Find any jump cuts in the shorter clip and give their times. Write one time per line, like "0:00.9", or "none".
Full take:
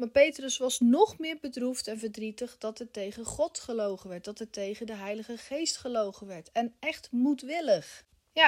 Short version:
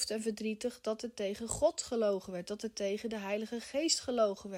none